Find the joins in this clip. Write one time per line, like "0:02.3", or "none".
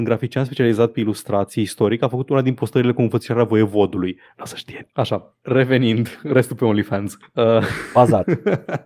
0:04.3